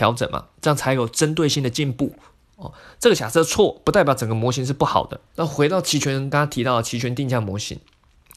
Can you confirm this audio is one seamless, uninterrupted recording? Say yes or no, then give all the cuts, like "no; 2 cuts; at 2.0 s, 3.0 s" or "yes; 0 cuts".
no; 2 cuts; at 5.3 s, 6.3 s